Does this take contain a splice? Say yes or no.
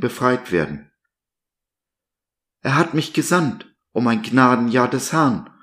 no